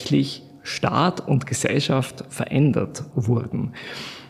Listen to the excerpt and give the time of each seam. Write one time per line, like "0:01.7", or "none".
0:03.1